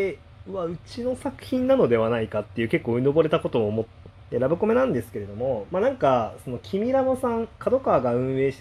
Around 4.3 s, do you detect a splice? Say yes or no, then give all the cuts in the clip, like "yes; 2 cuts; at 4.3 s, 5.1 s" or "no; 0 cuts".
yes; 1 cut; at 4.3 s